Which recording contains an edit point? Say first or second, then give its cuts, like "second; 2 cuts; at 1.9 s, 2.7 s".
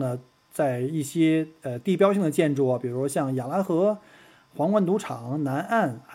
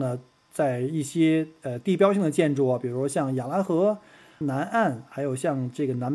second; 1 cut; at 4.4 s